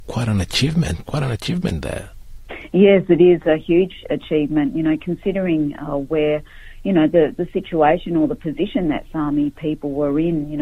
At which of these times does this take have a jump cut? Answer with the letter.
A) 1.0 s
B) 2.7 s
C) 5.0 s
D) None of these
A